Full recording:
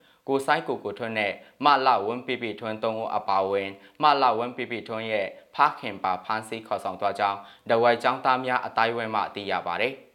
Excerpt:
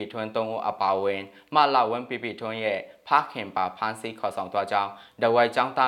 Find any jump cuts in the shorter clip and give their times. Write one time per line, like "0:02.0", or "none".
none